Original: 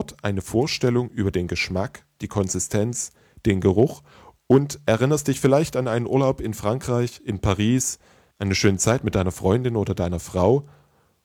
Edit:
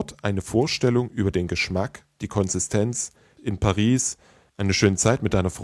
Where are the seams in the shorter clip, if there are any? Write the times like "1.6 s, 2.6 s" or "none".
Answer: 3.4 s